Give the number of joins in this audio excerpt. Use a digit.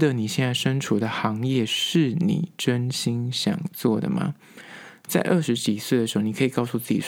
0